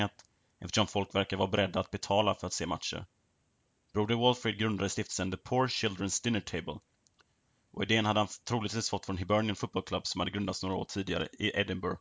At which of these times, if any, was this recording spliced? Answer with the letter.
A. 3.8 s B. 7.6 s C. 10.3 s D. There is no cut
D